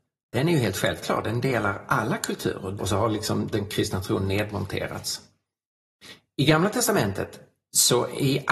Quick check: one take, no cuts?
no; 1 cut; at 2.8 s

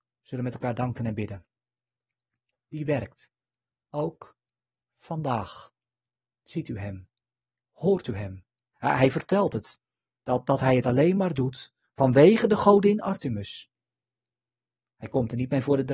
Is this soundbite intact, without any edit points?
no; 2 cuts; at 2.5 s, 8.7 s

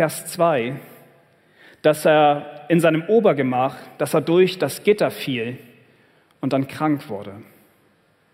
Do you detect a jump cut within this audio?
no; 0 cuts

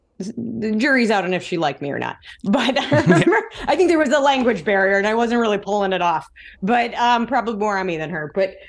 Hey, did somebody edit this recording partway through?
no; 0 cuts

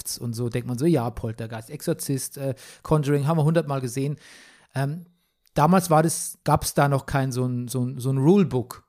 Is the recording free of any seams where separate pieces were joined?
no; 1 cut; at 6.4 s

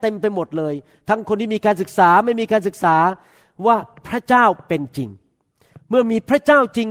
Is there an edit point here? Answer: no; 0 cuts

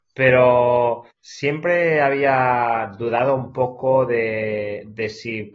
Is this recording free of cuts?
no; 1 cut; at 1.1 s

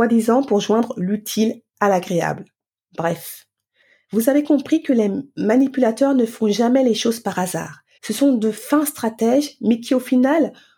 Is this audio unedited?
no; 1 cut; at 8.0 s

